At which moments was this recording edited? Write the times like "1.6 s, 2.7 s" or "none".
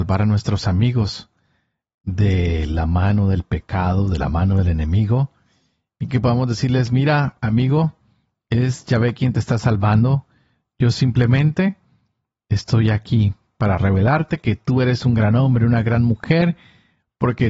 none